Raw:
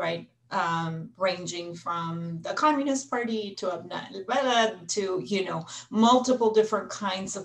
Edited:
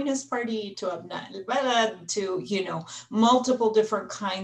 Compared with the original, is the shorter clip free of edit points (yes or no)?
yes